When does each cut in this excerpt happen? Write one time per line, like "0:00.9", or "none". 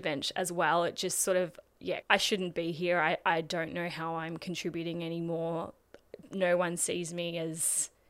0:02.0